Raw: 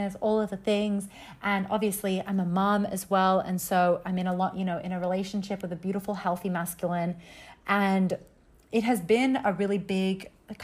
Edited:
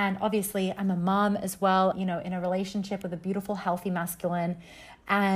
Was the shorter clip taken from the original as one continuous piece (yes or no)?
no